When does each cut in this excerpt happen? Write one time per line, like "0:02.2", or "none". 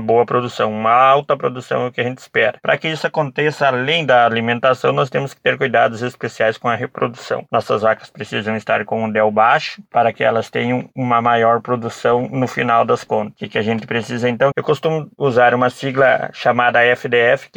0:14.5